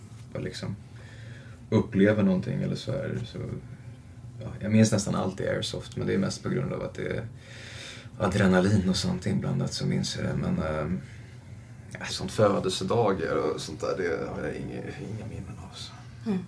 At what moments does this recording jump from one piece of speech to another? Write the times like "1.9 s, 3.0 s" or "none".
12.1 s